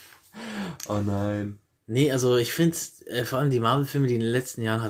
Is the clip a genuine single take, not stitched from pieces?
yes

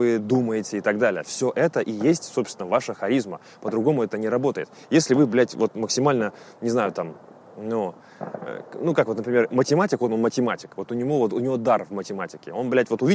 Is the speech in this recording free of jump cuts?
yes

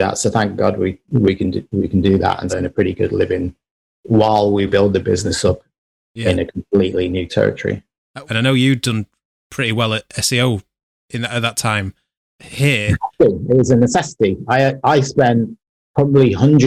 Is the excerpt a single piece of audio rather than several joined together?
no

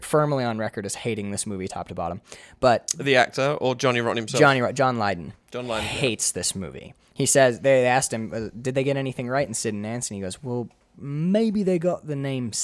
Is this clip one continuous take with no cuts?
yes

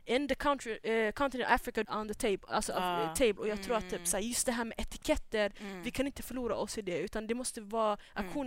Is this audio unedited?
no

